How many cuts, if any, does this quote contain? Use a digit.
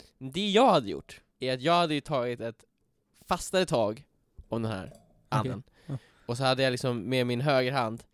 1